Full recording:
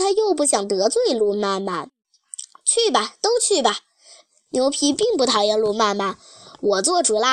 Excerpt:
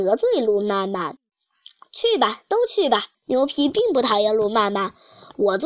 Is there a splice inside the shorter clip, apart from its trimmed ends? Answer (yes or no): yes